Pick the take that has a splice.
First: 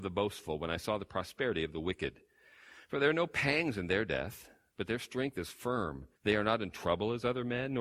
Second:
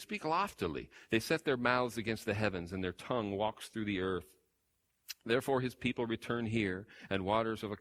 first; 1 cut; at 6.2 s

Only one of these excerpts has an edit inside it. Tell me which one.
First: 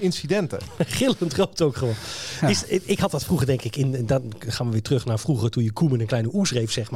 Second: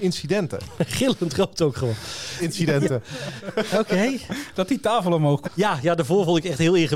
second; 2 cuts; at 2.4 s, 5.4 s

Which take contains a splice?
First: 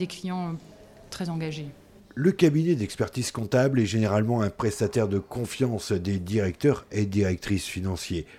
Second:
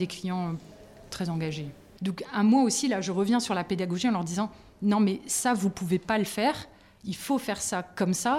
second; 1 cut; at 2.0 s

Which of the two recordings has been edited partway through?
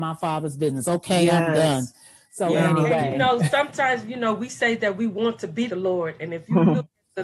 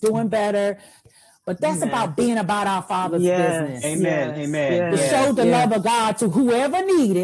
first; 1 cut; at 5.7 s

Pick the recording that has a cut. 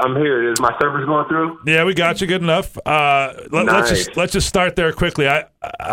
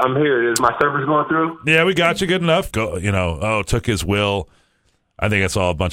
second; 1 cut; at 2.7 s

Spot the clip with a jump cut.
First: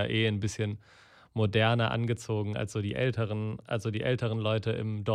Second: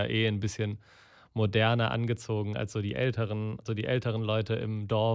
second; 1 cut; at 3.7 s

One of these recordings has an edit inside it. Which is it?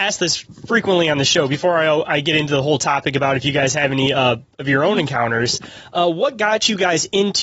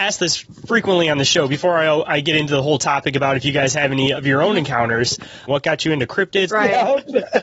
second; 3 cuts; at 4.1 s, 5.5 s, 6.5 s

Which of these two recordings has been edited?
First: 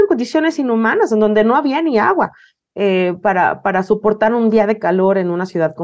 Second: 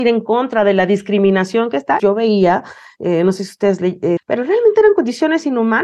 second; 2 cuts; at 2.0 s, 4.2 s

